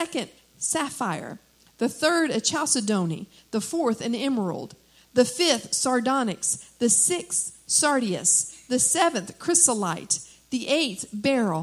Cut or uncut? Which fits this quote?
uncut